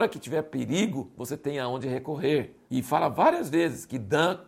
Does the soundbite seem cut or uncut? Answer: cut